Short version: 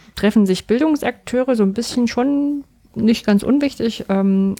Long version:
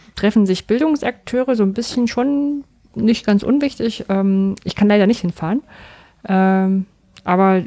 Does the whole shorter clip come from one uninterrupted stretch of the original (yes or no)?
yes